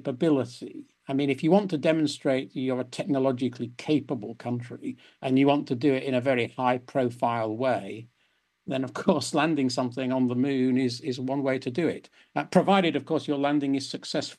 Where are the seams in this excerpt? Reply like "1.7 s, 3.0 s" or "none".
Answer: none